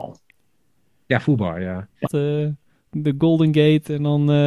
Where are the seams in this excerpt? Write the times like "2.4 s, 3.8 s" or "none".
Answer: 2.1 s